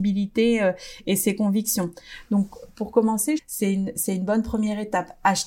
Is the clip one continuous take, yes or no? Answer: no